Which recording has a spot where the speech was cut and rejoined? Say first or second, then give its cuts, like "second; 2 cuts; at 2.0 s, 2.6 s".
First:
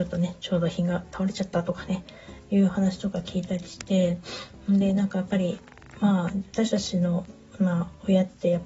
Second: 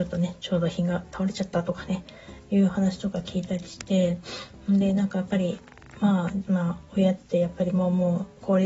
second; 1 cut; at 6.5 s